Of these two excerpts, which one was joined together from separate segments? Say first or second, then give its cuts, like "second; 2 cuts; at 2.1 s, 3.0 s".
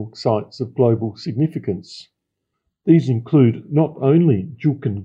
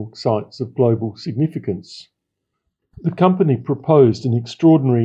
second; 1 cut; at 2.8 s